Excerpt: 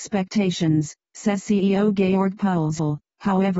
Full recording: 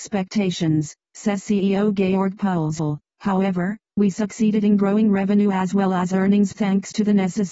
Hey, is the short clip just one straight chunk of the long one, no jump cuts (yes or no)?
yes